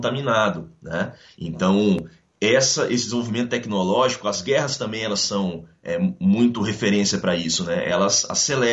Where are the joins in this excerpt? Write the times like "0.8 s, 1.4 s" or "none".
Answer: none